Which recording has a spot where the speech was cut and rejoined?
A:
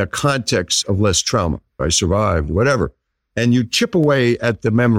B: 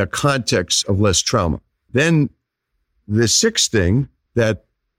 A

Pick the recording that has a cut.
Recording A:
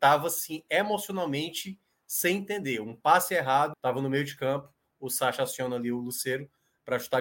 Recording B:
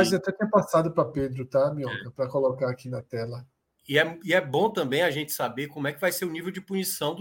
A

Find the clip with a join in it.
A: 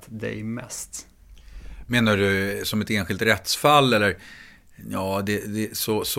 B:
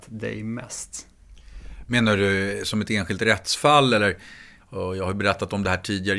B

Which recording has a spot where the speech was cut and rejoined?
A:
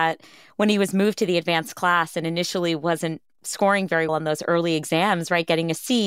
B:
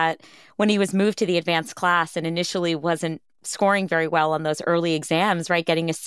A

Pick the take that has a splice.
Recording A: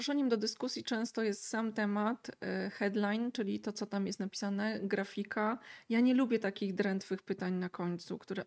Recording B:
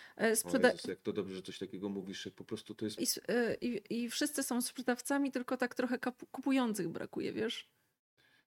B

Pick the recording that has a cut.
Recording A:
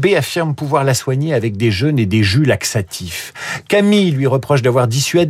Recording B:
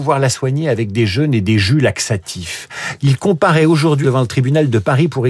B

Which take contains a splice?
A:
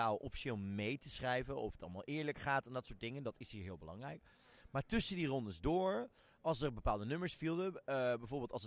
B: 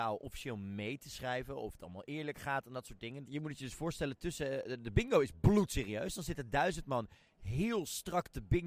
B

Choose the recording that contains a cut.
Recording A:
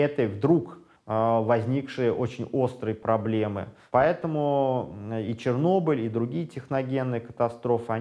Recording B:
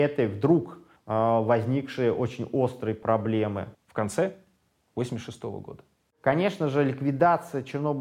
B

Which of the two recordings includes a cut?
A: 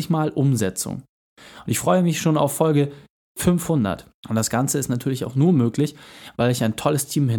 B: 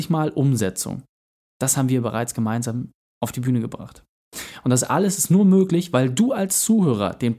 A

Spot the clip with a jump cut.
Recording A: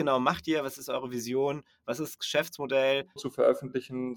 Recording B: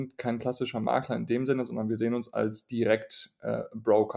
A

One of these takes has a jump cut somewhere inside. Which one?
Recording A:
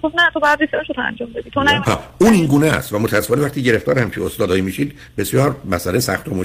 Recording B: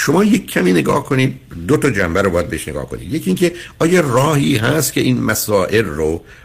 A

